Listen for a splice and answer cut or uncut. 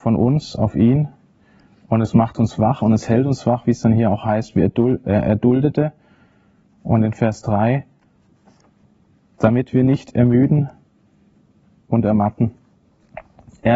uncut